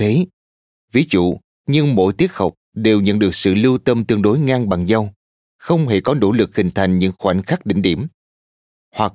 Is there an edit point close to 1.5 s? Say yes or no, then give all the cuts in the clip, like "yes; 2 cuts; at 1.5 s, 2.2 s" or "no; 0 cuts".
yes; 1 cut; at 1.5 s